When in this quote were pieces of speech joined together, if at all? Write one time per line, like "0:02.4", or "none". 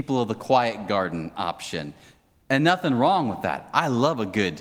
none